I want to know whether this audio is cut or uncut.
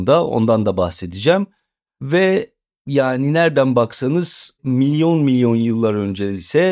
cut